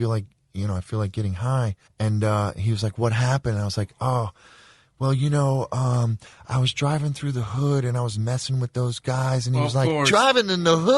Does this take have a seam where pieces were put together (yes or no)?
yes